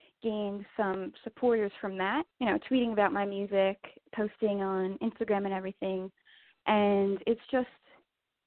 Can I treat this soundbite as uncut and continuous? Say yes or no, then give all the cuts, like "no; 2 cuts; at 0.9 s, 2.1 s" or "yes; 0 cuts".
no; 1 cut; at 2.3 s